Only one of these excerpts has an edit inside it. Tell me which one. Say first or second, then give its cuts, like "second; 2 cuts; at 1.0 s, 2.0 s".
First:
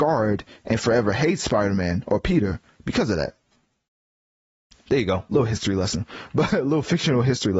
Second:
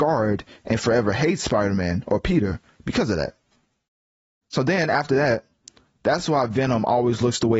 second; 1 cut; at 4.4 s